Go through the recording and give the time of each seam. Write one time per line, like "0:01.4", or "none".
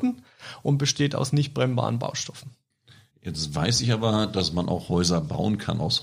none